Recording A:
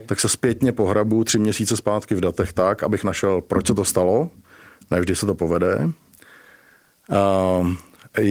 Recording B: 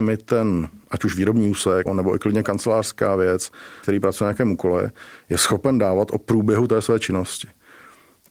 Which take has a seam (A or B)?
B